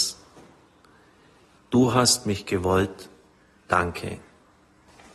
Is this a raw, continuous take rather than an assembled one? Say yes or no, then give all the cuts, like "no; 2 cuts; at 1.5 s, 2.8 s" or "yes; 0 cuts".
no; 1 cut; at 1.6 s